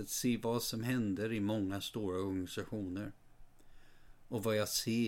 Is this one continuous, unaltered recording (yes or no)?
yes